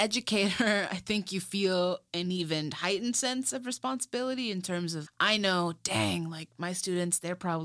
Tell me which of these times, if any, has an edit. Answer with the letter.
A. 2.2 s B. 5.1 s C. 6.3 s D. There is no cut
B